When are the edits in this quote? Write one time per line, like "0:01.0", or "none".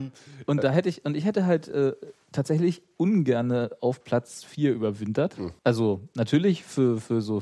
0:05.6